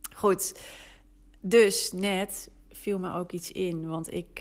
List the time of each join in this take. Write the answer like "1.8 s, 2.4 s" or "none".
1.4 s